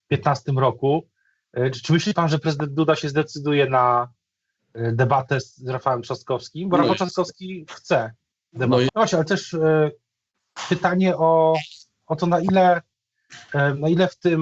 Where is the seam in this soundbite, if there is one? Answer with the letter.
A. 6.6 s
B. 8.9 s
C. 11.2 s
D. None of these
B